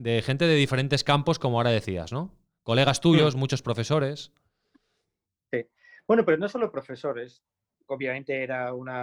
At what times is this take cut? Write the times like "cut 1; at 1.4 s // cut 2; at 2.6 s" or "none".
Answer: none